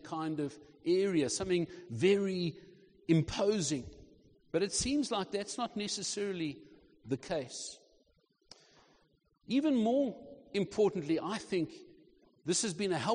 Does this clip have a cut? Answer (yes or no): no